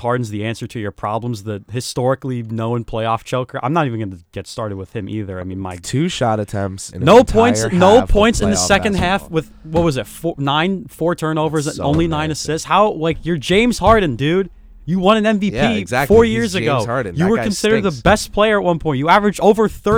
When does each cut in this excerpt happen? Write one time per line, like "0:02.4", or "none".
0:06.9